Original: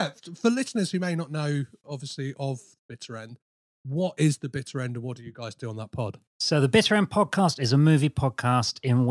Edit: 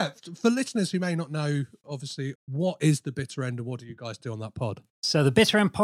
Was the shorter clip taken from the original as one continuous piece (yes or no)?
no